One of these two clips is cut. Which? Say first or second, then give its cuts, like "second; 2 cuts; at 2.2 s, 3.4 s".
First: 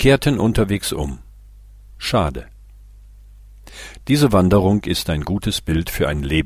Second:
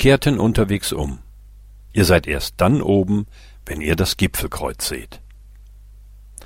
second; 1 cut; at 1.9 s